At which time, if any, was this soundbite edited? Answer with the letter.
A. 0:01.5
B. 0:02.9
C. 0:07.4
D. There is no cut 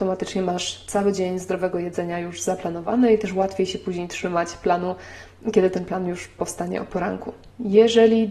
D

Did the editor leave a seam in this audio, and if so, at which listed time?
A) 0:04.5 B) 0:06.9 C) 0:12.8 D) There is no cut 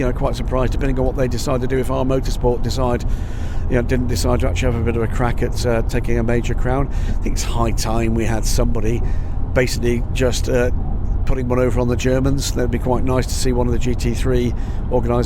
D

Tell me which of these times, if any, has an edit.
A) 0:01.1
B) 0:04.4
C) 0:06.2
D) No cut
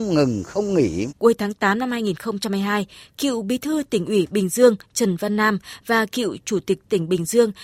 A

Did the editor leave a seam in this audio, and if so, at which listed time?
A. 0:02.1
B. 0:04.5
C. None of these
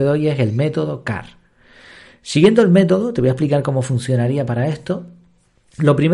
C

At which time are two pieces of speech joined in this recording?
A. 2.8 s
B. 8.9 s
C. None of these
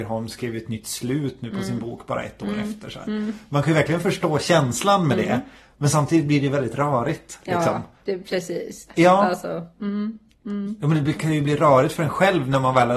B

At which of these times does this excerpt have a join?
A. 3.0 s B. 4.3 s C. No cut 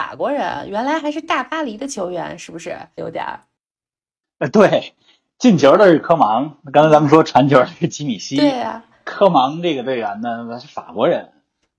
A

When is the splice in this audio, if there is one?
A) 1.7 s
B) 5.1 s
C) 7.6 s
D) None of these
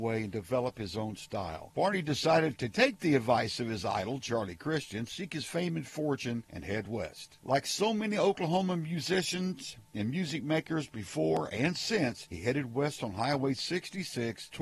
A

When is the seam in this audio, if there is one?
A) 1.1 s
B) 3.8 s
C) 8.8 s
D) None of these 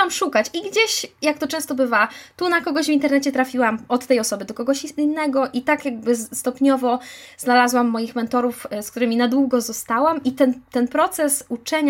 D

